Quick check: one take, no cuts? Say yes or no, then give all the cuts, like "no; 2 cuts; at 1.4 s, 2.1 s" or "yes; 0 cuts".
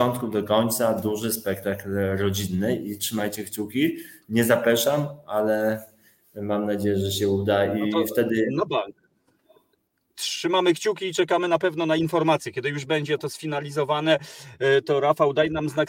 yes; 0 cuts